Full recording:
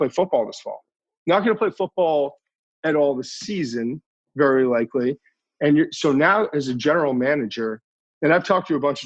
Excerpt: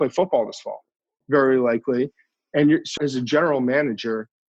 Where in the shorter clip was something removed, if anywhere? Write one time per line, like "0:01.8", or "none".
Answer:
0:01.2
0:03.0